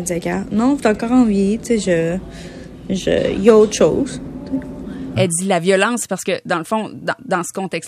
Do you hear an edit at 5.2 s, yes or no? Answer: yes